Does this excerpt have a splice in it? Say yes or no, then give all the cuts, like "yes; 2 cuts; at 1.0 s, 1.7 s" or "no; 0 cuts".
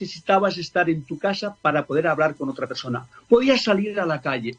no; 0 cuts